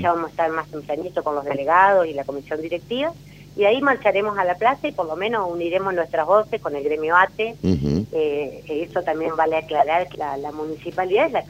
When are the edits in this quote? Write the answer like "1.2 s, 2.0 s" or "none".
8.1 s, 10.1 s